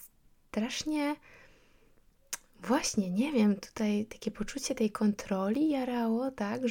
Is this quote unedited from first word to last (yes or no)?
yes